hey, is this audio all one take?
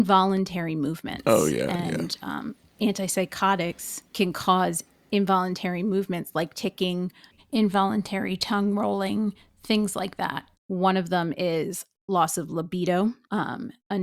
no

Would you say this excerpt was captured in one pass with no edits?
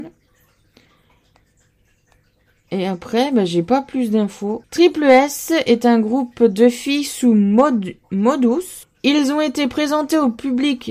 no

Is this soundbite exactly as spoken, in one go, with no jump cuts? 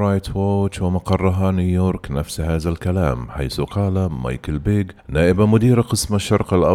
no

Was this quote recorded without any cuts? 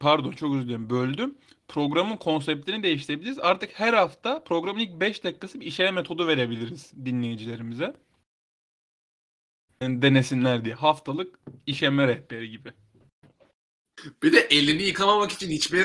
yes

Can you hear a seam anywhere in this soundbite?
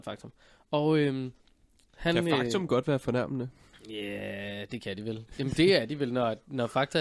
no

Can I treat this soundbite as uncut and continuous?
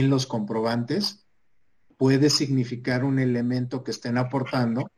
yes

